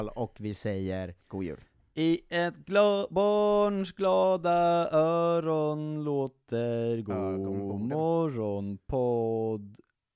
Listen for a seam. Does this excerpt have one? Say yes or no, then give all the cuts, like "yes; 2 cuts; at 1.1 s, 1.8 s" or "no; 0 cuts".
yes; 1 cut; at 1.2 s